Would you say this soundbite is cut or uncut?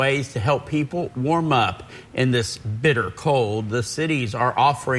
uncut